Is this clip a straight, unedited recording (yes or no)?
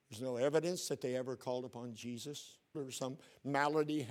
no